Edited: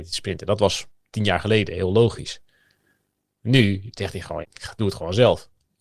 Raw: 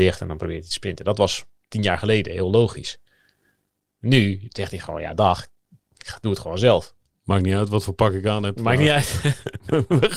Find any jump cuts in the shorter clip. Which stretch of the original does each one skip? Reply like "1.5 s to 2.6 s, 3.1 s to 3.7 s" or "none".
5.0 s to 5.9 s